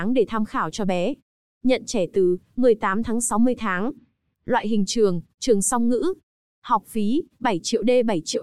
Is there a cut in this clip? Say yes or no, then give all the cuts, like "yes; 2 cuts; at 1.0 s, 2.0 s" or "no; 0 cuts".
no; 0 cuts